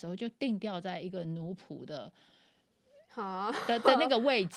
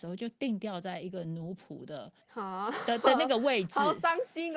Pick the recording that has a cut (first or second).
second